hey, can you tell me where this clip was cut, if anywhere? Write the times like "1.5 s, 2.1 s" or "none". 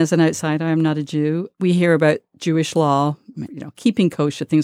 3.5 s